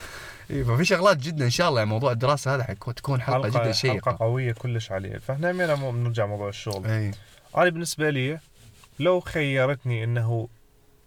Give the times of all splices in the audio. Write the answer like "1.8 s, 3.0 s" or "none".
2.6 s